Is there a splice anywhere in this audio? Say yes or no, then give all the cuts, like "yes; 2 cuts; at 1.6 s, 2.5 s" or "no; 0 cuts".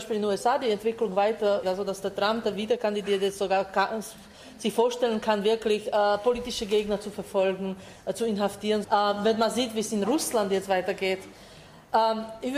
yes; 2 cuts; at 1.6 s, 8.8 s